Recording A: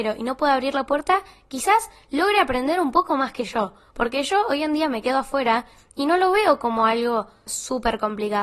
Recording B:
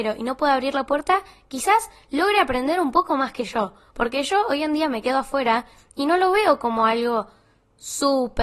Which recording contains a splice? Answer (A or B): A